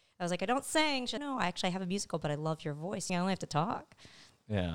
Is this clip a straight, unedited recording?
no; 1 cut; at 3.1 s

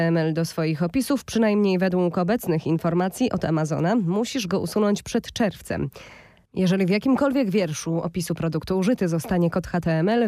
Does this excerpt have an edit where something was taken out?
no; 0 cuts

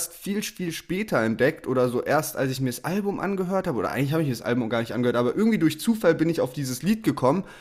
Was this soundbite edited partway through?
no; 0 cuts

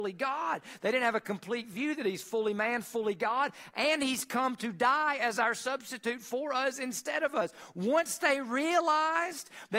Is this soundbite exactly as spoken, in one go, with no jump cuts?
yes; 0 cuts

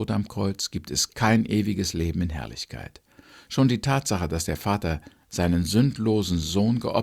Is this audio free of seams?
yes; 0 cuts

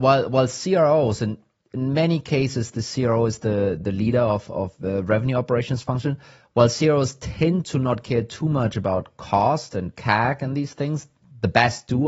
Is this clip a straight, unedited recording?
no; 1 cut; at 3.8 s

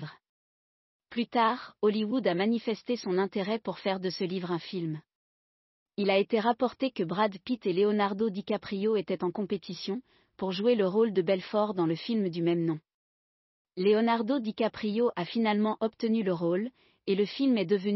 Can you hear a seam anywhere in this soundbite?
no; 0 cuts

